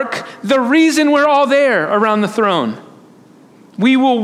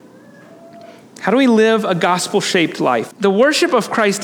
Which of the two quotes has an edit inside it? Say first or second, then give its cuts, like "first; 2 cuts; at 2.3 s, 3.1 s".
second; 2 cuts; at 1.0 s, 3.1 s